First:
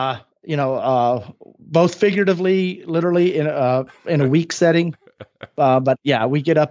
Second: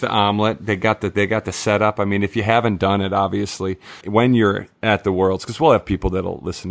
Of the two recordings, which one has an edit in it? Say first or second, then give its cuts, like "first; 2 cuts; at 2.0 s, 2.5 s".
second; 1 cut; at 4.0 s